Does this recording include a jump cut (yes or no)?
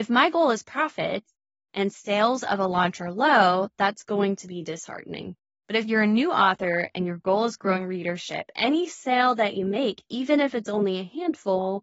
no